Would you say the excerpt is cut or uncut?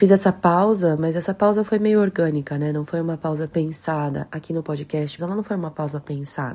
cut